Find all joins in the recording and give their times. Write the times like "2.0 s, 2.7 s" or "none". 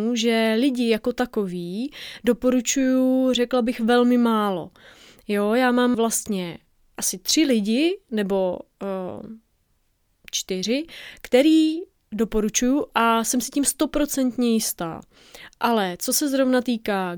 5.9 s

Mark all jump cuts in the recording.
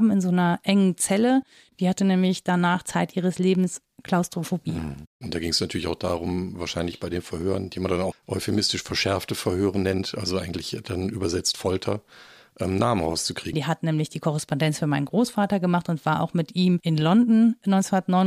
8.1 s, 13.5 s

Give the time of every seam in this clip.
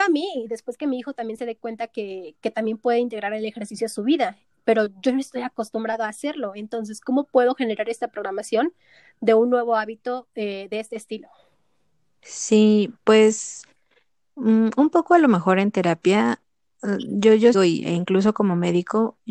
17.5 s

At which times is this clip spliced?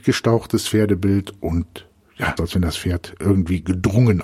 2.4 s

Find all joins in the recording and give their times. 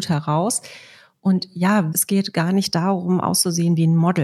1.9 s

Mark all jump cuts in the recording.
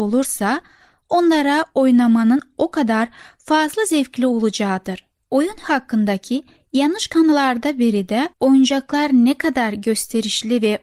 5.2 s, 8.3 s

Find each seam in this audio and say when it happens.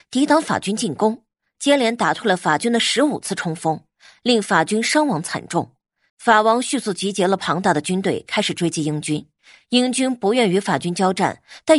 1.4 s, 6.1 s

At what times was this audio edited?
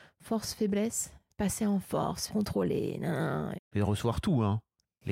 2.3 s, 3.5 s

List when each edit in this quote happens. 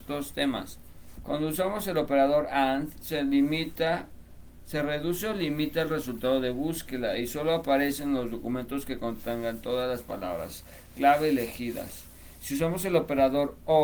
1.2 s

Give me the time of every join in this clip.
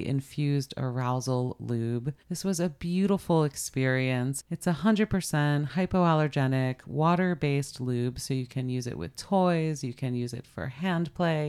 2.2 s

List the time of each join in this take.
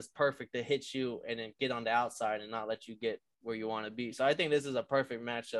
none

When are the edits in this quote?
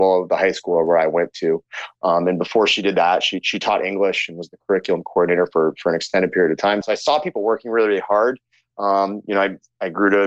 6.8 s

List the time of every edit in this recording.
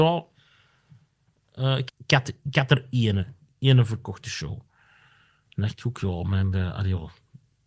1.9 s

